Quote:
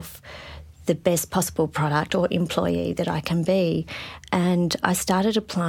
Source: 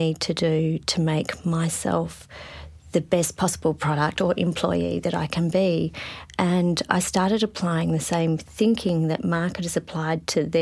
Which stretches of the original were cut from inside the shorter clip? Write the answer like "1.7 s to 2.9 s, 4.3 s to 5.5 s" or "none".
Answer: none

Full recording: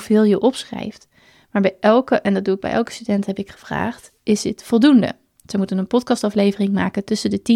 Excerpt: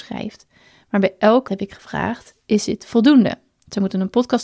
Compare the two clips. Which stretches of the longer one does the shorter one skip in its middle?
2.1 s to 3.3 s

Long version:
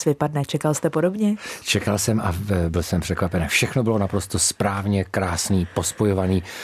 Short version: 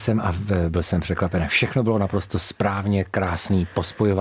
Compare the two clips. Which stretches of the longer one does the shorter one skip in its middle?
none

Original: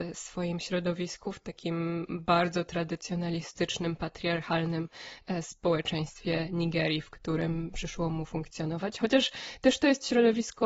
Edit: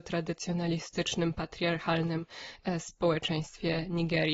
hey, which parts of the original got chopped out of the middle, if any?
none

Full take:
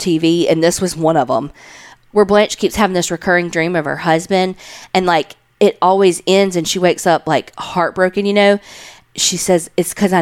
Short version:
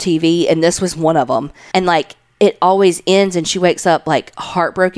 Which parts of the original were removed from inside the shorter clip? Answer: 1.7 s to 4.9 s

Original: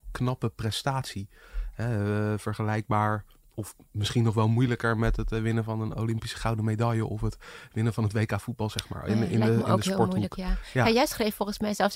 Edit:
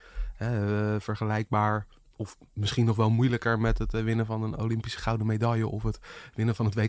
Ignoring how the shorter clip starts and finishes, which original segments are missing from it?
none

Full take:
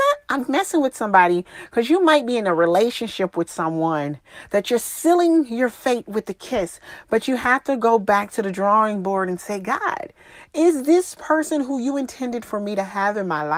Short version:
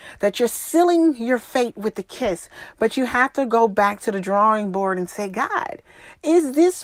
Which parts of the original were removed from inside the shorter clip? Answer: none

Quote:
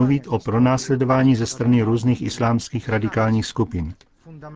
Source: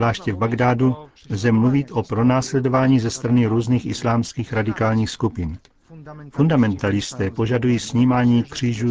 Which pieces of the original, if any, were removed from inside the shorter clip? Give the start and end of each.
none

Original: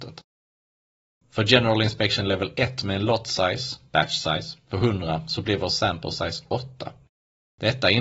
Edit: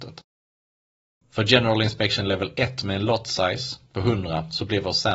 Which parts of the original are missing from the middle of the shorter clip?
3.9 s to 4.6 s

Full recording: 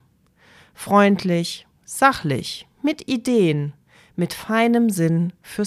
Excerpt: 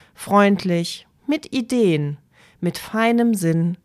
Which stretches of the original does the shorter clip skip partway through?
1.8 s to 2.7 s

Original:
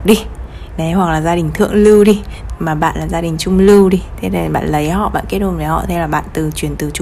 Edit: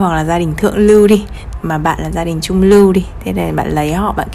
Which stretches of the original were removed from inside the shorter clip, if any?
none

